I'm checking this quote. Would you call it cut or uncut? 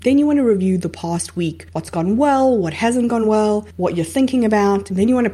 uncut